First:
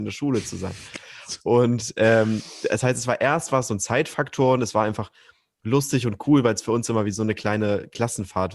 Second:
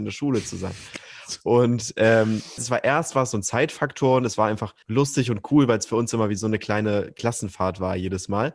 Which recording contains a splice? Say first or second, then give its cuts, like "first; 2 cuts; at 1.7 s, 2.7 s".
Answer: second; 2 cuts; at 2.6 s, 4.8 s